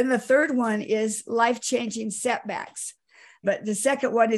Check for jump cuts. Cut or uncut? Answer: cut